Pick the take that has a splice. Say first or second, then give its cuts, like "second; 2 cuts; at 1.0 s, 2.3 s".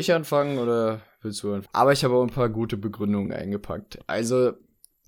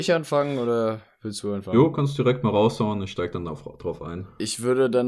first; 1 cut; at 1.7 s